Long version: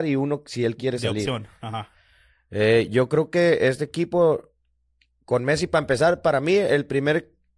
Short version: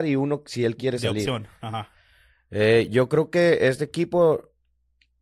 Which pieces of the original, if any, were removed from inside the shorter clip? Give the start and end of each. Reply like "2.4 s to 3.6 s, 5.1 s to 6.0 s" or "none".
none